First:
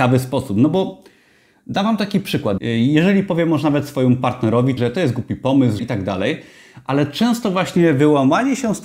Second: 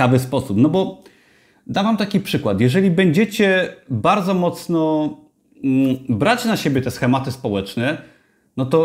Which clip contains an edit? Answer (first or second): first